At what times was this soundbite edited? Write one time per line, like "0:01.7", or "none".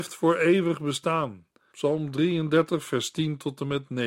0:01.7